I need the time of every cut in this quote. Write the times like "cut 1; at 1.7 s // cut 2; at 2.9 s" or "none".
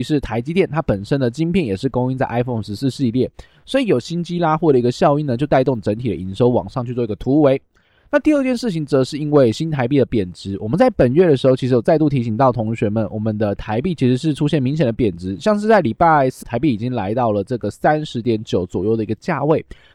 cut 1; at 16.4 s

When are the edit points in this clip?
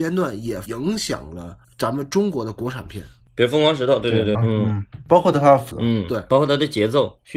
cut 1; at 4.4 s // cut 2; at 5.7 s

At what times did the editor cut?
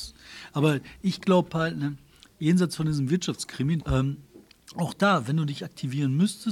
cut 1; at 3.8 s

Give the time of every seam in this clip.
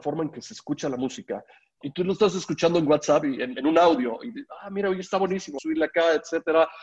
cut 1; at 1.8 s // cut 2; at 5.6 s

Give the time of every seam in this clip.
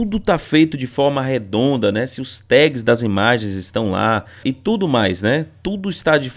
cut 1; at 4.4 s

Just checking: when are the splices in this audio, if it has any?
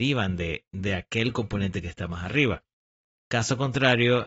cut 1; at 3.2 s

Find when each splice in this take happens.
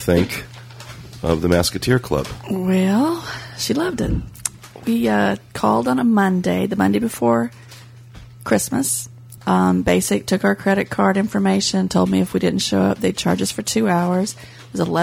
cut 1; at 9.4 s

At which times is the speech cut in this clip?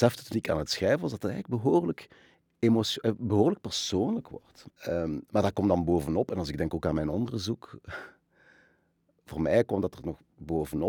cut 1; at 4.7 s

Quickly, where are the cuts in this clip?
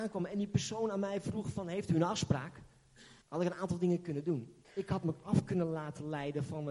cut 1; at 3.2 s // cut 2; at 4.6 s

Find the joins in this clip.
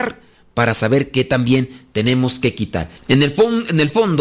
cut 1; at 3.0 s

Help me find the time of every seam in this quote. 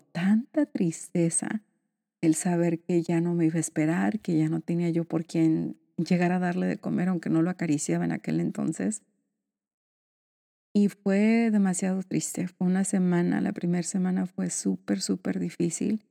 none

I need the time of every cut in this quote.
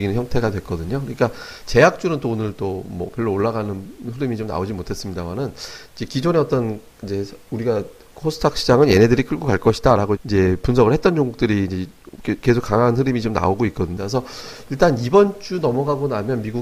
cut 1; at 10.2 s // cut 2; at 14.0 s

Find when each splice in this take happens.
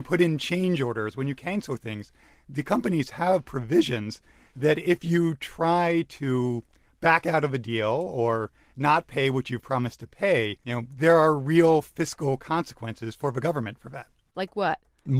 cut 1; at 10.6 s // cut 2; at 14.3 s

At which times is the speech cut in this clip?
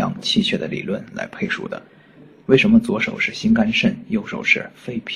cut 1; at 2.4 s

